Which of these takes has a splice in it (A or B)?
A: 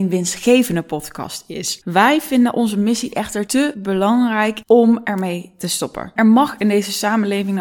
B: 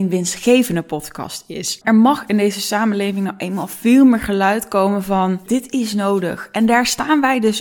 B